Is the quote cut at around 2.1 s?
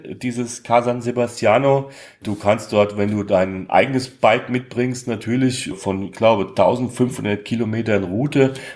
no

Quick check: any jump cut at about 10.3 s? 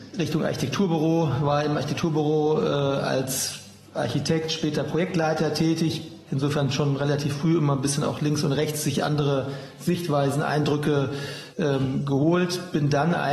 no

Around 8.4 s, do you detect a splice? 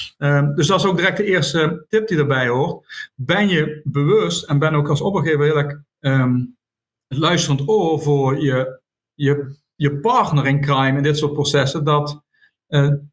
no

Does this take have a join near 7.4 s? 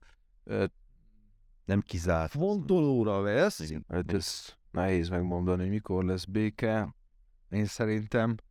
no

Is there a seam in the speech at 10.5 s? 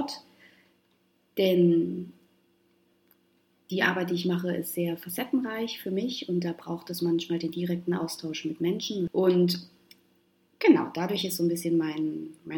no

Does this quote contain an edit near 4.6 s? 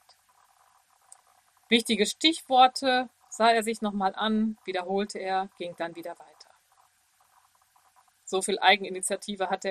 no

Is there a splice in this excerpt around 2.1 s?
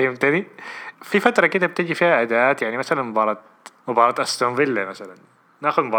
no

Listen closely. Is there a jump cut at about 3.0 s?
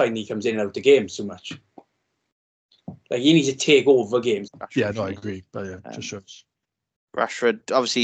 no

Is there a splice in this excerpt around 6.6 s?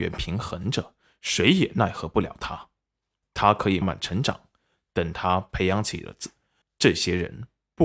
yes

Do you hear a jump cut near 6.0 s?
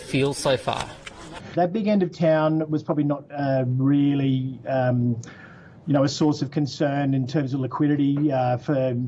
no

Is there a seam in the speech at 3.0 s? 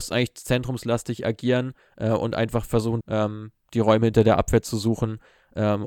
yes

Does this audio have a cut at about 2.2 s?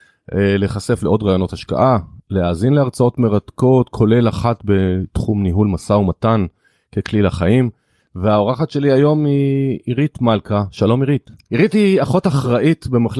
no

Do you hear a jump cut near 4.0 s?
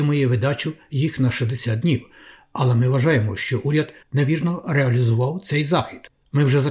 yes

